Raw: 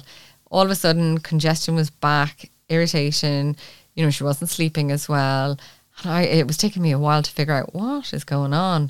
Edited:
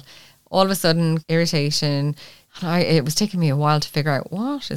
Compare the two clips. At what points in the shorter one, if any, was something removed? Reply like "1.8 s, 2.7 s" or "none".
1.2 s, 2.4 s